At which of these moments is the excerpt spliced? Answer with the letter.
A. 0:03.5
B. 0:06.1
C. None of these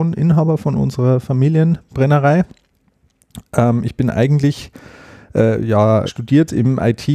B